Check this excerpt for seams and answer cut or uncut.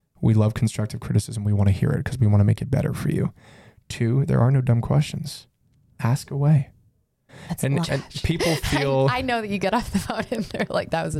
cut